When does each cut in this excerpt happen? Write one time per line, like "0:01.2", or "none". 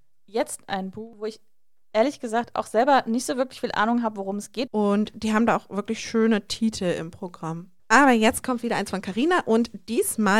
0:04.7
0:07.8